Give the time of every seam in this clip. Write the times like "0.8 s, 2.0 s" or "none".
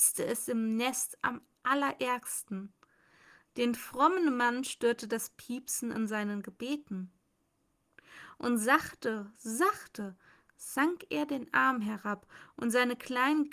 none